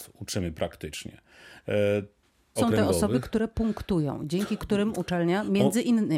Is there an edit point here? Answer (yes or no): yes